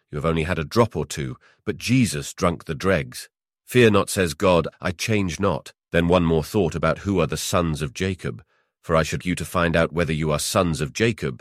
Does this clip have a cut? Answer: yes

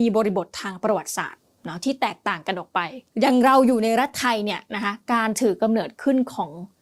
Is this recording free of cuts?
no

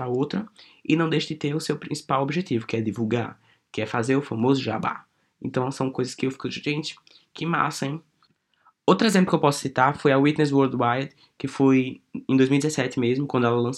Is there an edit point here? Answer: no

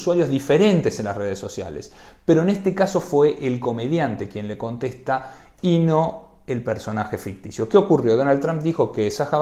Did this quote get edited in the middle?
no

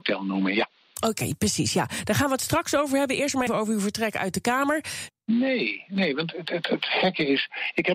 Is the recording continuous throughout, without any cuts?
no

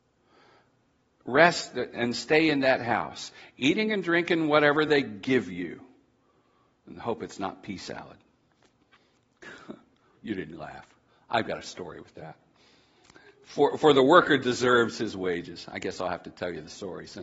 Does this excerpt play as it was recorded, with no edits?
yes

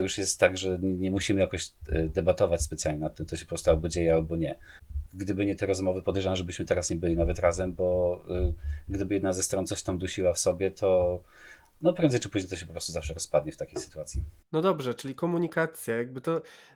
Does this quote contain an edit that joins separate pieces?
yes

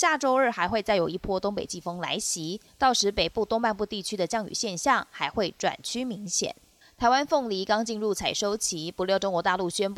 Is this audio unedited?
yes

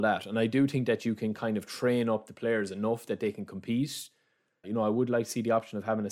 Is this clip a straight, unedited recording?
no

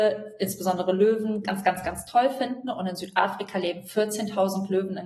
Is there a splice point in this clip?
no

